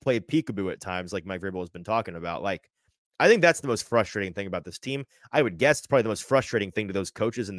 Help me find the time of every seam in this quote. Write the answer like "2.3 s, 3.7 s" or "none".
none